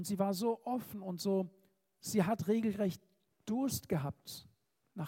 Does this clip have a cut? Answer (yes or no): no